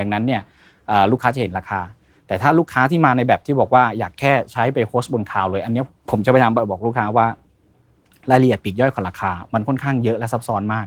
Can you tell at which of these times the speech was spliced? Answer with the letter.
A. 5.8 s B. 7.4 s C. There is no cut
C